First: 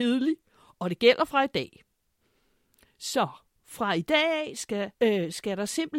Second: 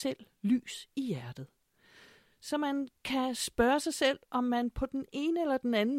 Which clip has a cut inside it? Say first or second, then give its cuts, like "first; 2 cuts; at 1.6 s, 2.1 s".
first; 1 cut; at 4.9 s